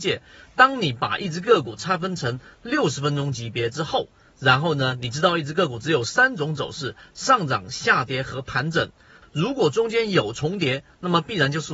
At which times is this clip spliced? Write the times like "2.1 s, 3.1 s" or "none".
9.2 s